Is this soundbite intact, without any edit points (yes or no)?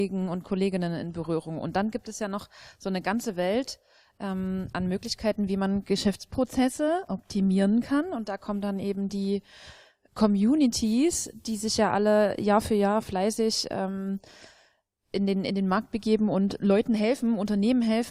yes